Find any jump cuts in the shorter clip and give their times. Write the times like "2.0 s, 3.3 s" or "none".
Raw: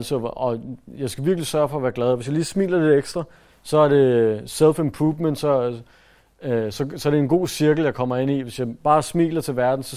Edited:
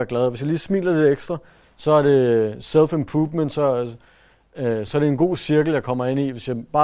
4.9 s